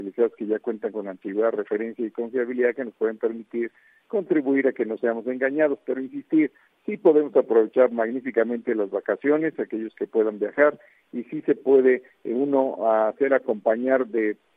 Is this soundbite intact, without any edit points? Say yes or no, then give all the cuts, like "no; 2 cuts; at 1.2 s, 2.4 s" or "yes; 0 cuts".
yes; 0 cuts